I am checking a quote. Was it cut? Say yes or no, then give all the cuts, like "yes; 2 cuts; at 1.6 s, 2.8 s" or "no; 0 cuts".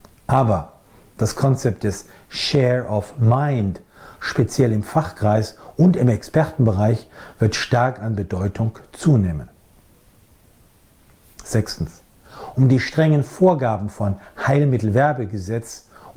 yes; 1 cut; at 4.2 s